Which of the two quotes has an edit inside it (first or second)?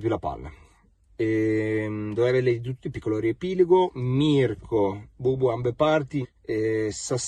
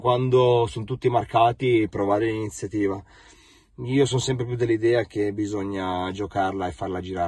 first